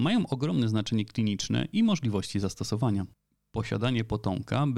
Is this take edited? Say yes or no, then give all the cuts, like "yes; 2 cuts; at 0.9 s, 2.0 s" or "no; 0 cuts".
no; 0 cuts